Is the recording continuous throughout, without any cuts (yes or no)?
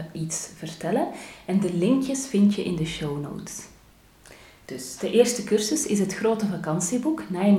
yes